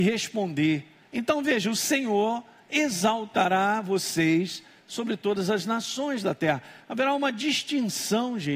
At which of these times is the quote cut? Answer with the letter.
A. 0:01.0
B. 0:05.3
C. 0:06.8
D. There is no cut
A